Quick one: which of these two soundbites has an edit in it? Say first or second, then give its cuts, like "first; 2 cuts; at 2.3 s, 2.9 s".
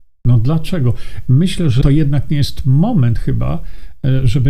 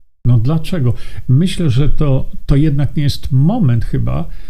first; 1 cut; at 1.8 s